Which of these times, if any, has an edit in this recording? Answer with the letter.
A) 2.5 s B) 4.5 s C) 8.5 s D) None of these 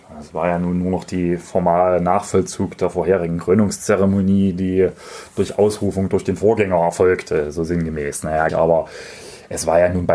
C